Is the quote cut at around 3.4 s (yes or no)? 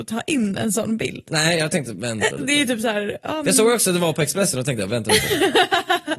no